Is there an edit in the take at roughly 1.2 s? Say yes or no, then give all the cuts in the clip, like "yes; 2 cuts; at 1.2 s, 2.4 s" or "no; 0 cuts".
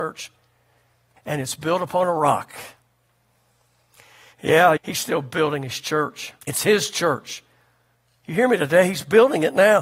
yes; 3 cuts; at 1.2 s, 4.8 s, 6.4 s